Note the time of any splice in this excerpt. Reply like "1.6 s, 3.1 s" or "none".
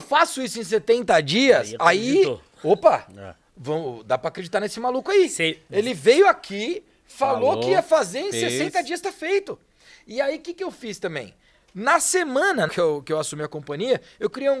12.7 s